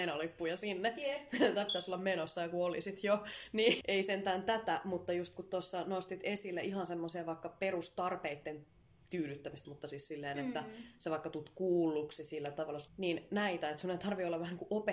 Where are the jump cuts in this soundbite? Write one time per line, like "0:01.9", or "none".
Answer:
0:03.8
0:09.6
0:12.9